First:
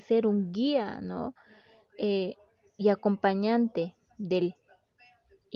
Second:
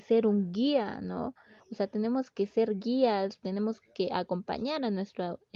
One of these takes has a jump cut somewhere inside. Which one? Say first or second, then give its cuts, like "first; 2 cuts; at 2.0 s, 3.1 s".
second; 1 cut; at 1.6 s